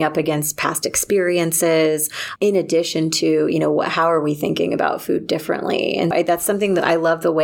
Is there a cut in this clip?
yes; 2 cuts; at 2.4 s, 6.1 s

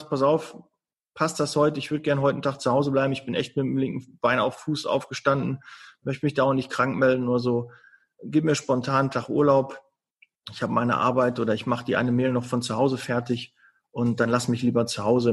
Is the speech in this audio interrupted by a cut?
no; 0 cuts

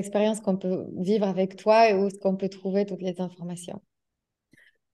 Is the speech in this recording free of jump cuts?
yes; 0 cuts

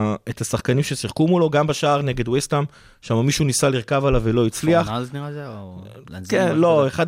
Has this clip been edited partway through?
no; 0 cuts

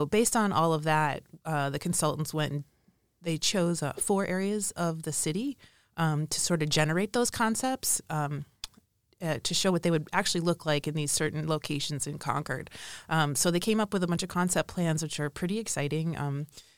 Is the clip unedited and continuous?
yes; 0 cuts

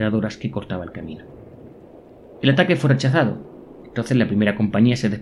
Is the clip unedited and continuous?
yes; 0 cuts

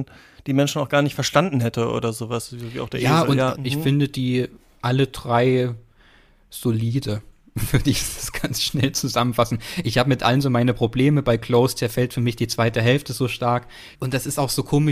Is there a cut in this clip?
yes; 2 cuts; at 3.5 s, 13.9 s

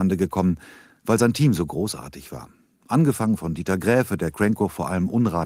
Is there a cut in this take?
no; 0 cuts

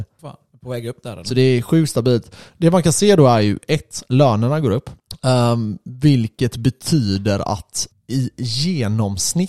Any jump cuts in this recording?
no; 0 cuts

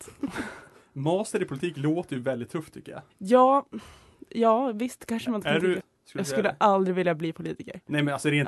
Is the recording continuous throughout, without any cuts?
no; 2 cuts; at 3.1 s, 5.8 s

